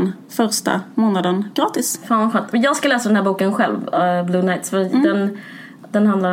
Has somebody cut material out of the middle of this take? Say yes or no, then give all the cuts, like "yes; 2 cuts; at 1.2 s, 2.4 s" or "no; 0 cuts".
no; 0 cuts